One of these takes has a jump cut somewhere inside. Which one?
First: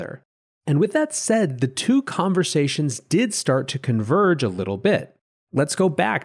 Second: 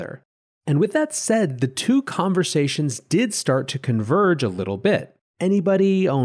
second; 1 cut; at 5.3 s

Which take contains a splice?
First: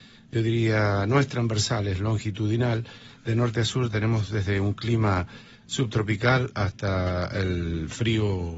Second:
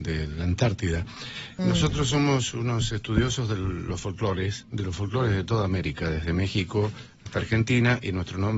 second; 1 cut; at 1.6 s

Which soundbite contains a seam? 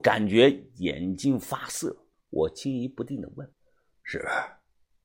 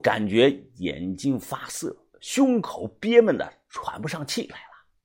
first; 2 cuts; at 2.1 s, 3.5 s

